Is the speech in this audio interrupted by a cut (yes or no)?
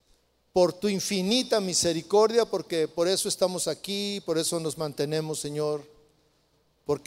no